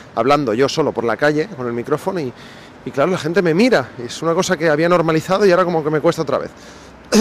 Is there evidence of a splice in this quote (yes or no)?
no